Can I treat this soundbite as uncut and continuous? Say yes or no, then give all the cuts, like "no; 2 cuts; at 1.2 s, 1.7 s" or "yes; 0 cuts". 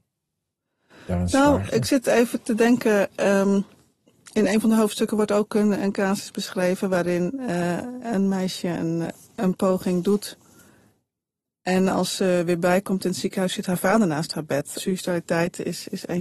no; 2 cuts; at 9.0 s, 14.8 s